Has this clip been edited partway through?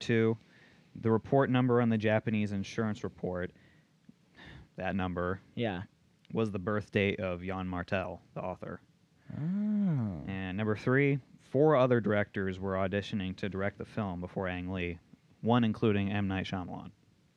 no; 0 cuts

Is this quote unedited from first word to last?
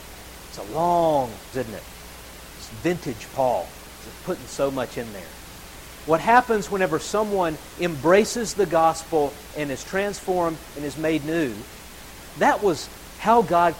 no; 3 cuts; at 1.5 s, 6.0 s, 12.3 s

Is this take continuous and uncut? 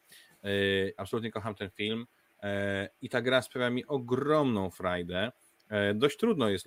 no; 1 cut; at 1.0 s

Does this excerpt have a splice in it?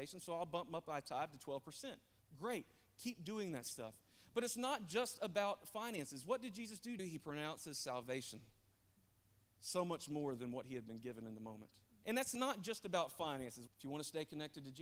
yes; 3 cuts; at 7.0 s, 12.0 s, 13.7 s

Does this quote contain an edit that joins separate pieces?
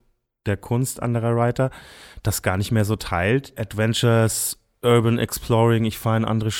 yes; 1 cut; at 3.6 s

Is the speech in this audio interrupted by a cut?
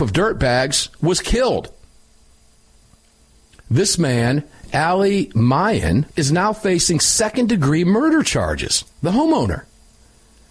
yes; 2 cuts; at 6.1 s, 8.9 s

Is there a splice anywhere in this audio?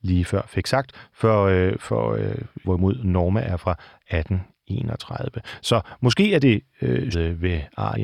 yes; 2 cuts; at 2.6 s, 7.1 s

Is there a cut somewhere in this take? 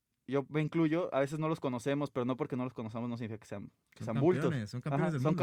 no; 0 cuts

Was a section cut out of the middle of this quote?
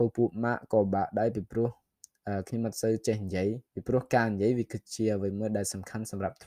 yes; 1 cut; at 3.7 s

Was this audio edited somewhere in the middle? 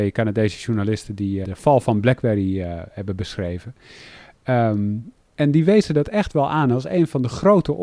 yes; 1 cut; at 1.4 s

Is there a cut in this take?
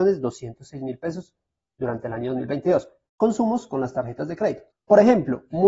yes; 2 cuts; at 3.1 s, 4.7 s

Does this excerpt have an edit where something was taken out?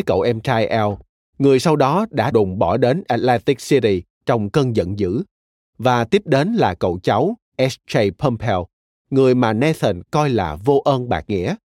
yes; 1 cut; at 2.3 s

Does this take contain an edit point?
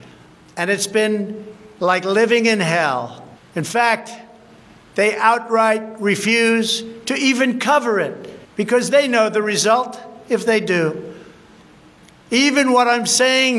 yes; 2 cuts; at 3.4 s, 8.4 s

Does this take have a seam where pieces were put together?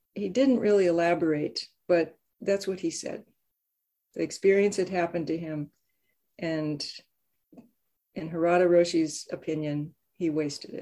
no; 0 cuts

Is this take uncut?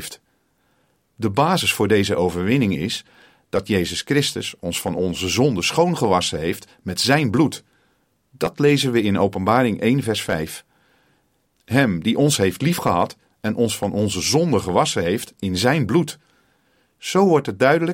yes; 0 cuts

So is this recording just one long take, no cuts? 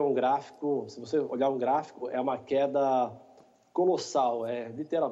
yes; 0 cuts

